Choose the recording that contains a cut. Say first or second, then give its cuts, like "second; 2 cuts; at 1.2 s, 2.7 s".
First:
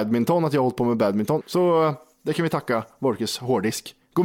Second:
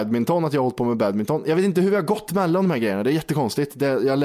first; 1 cut; at 1.4 s